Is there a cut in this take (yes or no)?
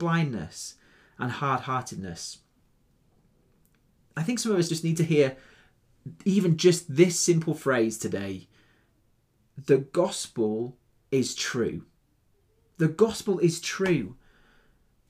no